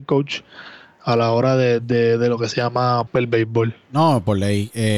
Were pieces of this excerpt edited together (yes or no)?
yes